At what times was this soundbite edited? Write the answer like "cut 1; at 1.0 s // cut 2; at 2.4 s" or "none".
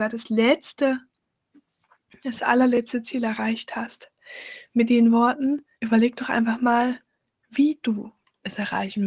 cut 1; at 5.7 s